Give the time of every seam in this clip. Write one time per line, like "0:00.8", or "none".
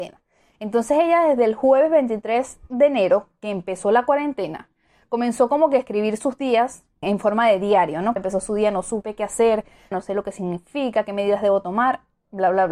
0:07.0
0:08.2
0:09.9